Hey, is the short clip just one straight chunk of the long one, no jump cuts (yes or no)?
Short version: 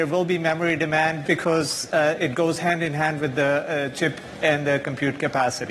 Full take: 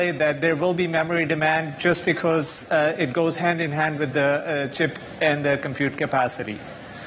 no